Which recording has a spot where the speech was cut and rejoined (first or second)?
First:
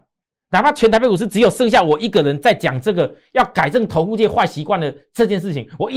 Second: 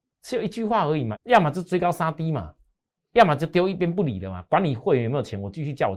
second